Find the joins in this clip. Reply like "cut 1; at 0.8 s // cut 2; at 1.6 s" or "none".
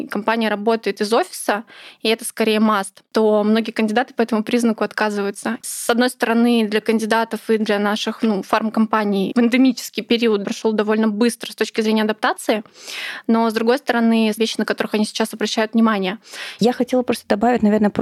cut 1; at 5.6 s // cut 2; at 14.4 s // cut 3; at 16.6 s